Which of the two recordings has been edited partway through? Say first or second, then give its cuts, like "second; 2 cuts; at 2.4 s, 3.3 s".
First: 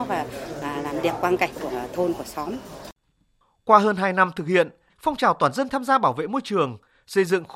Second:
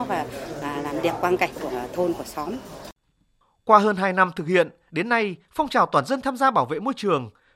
first; 1 cut; at 4.9 s